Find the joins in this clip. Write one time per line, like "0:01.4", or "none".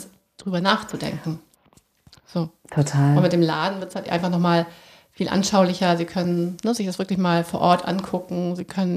none